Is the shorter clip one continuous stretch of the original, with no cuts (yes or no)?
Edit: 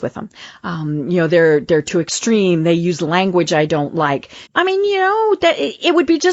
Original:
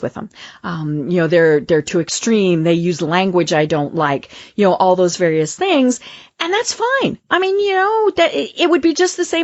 no